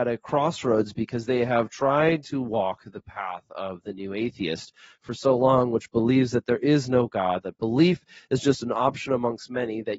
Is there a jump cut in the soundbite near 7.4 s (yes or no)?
yes